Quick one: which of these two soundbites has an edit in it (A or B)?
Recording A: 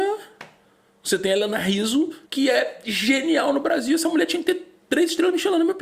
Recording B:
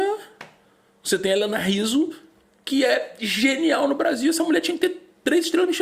A